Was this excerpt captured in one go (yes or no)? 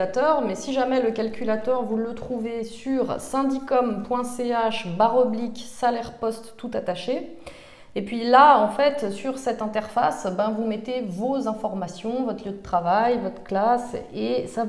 yes